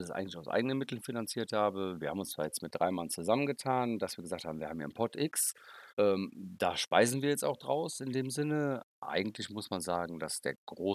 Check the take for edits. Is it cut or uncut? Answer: cut